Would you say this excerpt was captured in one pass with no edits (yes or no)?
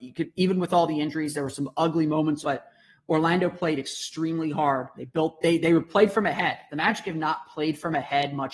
no